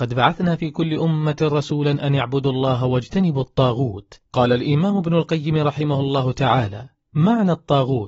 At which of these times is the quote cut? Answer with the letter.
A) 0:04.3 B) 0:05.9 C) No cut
A